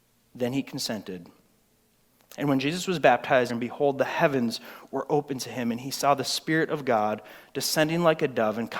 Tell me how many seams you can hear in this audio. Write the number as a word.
one